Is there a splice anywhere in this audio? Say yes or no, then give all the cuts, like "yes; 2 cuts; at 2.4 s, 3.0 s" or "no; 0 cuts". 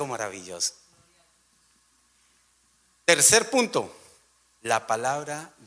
no; 0 cuts